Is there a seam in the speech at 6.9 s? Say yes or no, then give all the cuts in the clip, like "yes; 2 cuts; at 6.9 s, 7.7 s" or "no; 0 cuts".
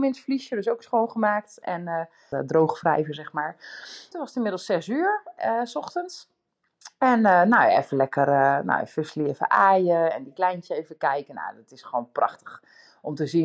no; 2 cuts; at 2.3 s, 4.1 s